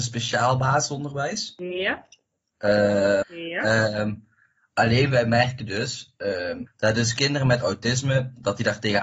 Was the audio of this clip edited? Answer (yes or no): yes